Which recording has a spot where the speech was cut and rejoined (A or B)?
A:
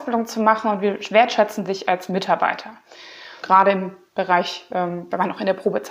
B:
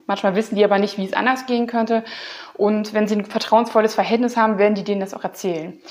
A